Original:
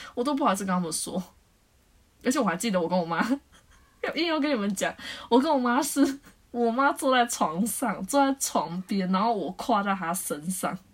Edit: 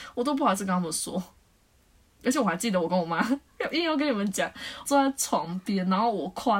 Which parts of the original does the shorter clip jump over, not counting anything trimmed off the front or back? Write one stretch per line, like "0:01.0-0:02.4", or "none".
0:03.5-0:03.9
0:05.3-0:08.1